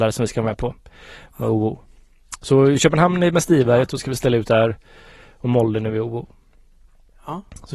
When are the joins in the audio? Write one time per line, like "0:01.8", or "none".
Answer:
none